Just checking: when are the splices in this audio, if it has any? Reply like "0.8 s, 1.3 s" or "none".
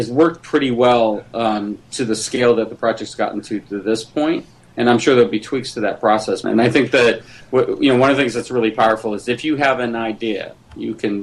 6.4 s